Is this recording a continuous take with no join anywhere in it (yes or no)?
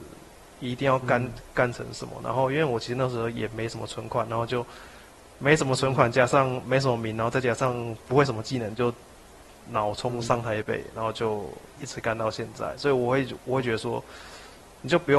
no